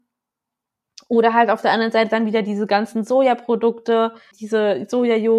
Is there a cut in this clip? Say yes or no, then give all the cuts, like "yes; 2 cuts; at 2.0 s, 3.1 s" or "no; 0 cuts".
yes; 1 cut; at 4.3 s